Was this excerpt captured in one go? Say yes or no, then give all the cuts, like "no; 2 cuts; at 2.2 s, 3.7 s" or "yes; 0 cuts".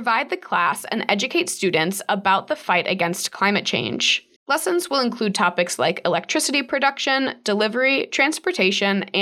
no; 1 cut; at 4.4 s